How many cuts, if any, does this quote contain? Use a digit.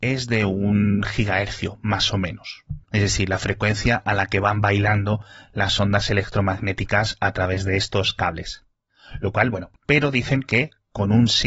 2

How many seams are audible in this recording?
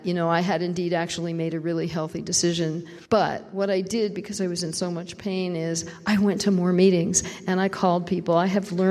1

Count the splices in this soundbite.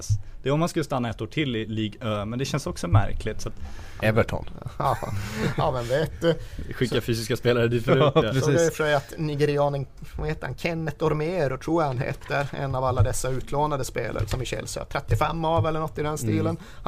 1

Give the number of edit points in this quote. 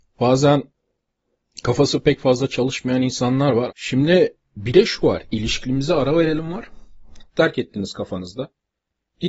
2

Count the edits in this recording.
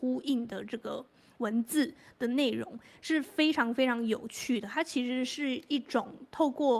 0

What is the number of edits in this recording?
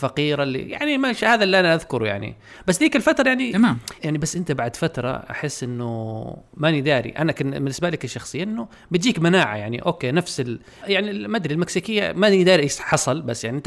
2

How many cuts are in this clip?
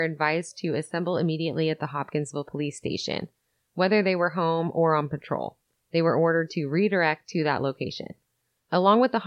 0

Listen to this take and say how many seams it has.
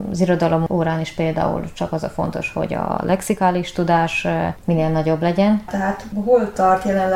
1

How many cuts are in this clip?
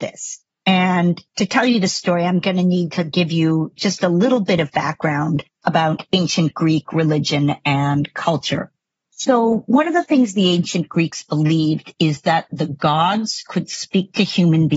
0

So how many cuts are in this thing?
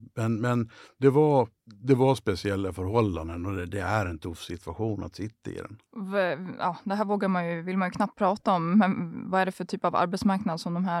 1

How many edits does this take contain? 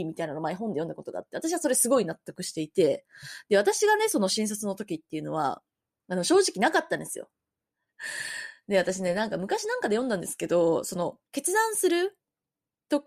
2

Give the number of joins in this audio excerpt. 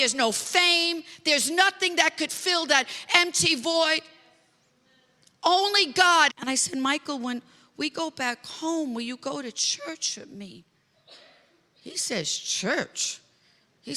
1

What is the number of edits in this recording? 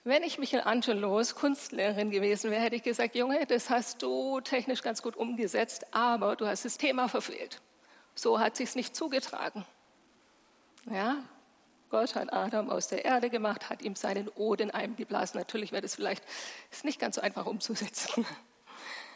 0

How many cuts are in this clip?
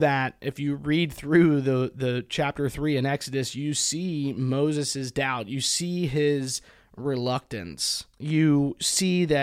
1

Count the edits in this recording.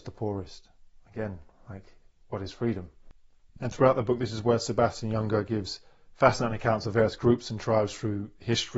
0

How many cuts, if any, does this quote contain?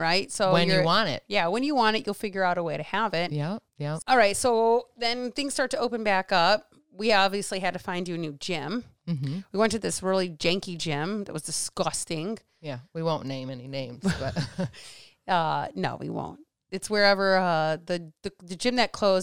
1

